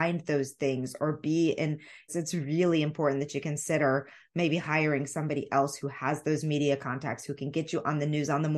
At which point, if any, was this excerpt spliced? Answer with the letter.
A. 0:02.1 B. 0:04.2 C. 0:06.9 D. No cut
A